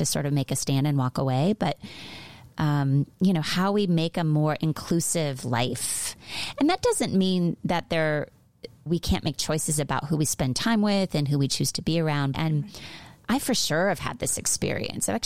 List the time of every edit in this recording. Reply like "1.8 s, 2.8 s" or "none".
8.9 s, 12.3 s